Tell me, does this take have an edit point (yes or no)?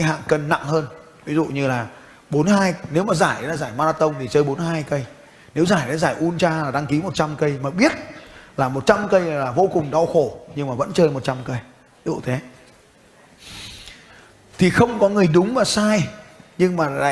no